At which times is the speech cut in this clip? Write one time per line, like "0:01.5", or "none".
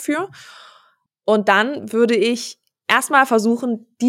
0:01.1